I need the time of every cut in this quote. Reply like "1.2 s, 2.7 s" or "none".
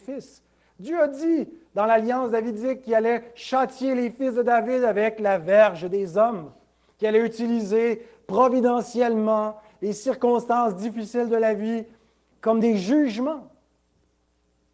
none